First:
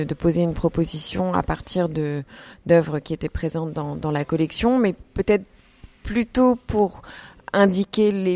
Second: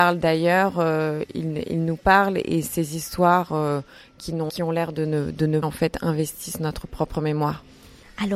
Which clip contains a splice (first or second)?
second